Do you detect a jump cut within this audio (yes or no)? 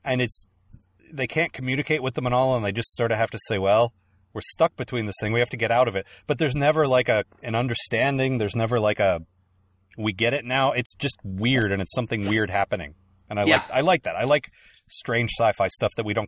no